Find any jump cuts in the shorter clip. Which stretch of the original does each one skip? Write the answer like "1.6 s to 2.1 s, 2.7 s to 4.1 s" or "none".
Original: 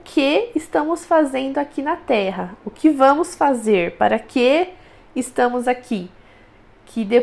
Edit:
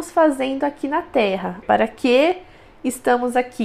2.6 s to 3.9 s